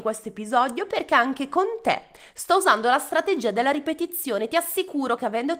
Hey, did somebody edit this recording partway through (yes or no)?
no